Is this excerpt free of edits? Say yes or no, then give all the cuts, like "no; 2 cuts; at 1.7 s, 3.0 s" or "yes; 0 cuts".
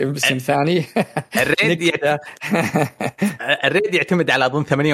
yes; 0 cuts